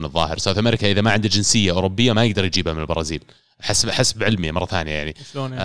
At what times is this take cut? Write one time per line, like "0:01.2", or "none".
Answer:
none